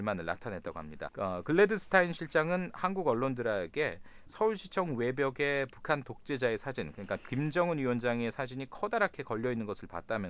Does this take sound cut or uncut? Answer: cut